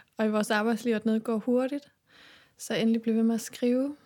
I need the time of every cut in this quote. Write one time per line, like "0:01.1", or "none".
none